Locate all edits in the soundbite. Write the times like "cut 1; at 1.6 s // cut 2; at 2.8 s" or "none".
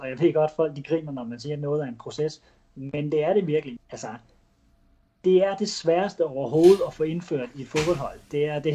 cut 1; at 3.8 s